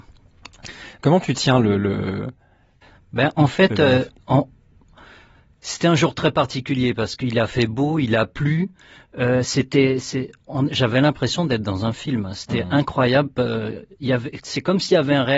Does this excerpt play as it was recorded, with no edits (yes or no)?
yes